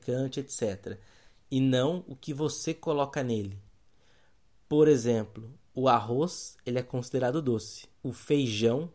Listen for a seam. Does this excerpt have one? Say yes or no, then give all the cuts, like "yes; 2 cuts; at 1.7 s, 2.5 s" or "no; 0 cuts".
yes; 1 cut; at 7.9 s